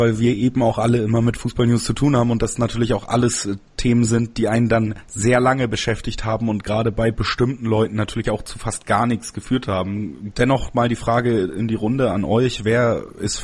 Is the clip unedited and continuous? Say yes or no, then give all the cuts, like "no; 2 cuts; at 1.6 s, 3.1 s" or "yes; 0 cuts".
no; 1 cut; at 10.3 s